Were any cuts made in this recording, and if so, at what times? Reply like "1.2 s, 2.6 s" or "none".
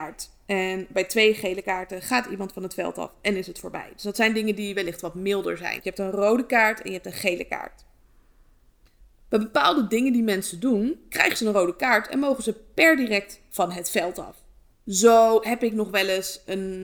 5.8 s, 14.7 s